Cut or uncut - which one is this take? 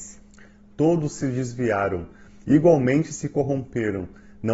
uncut